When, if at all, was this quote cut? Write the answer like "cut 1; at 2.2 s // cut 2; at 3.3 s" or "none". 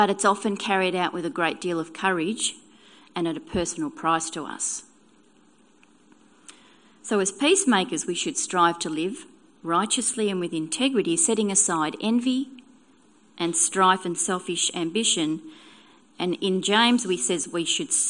none